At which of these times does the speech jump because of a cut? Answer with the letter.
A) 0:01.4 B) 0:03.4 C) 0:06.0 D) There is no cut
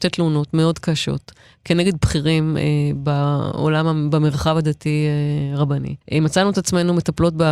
C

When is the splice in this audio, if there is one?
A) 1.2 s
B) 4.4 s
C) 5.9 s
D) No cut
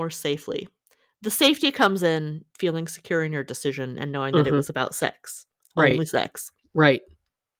D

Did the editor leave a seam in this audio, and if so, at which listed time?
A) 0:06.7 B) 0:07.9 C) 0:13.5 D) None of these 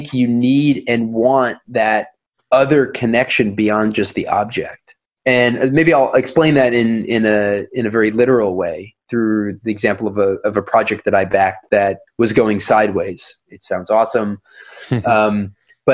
C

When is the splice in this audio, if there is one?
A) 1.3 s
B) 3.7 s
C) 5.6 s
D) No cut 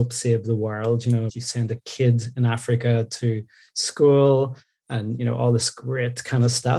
A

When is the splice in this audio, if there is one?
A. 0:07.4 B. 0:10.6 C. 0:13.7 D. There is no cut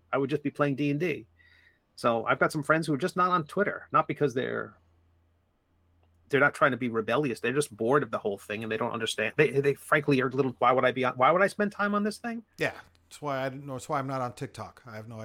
B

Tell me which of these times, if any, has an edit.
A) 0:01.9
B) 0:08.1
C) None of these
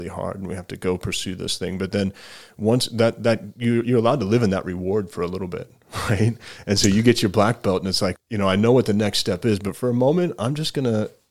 B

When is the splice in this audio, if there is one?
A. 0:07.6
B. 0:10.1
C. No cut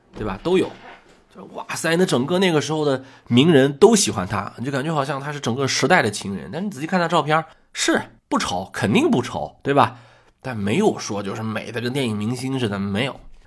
C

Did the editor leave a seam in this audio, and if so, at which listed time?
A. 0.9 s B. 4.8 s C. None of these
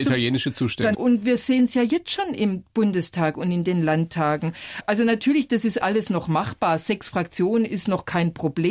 A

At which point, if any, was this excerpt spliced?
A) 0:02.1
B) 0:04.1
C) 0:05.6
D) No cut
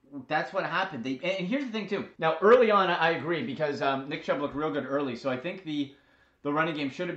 A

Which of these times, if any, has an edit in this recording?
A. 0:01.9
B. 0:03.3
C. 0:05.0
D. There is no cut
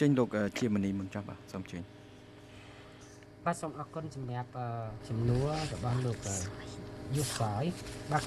C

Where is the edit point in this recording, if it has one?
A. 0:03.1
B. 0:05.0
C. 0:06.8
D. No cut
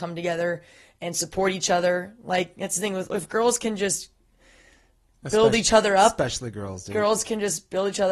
A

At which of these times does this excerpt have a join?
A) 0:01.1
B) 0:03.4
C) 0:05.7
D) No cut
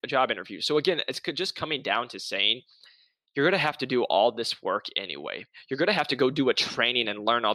D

